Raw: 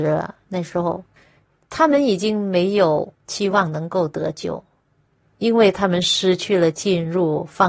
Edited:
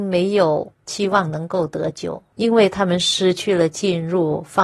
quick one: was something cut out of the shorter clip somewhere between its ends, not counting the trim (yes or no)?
yes